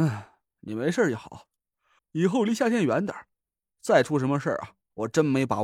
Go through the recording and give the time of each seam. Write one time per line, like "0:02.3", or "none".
0:02.0